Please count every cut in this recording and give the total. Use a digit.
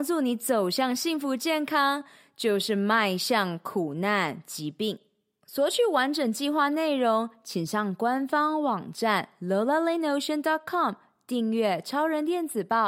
0